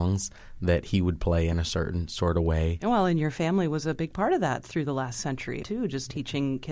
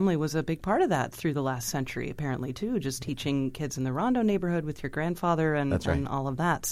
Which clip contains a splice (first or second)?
first